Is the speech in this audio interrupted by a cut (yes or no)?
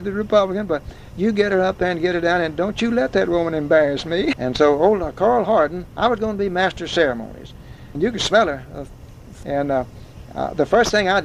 yes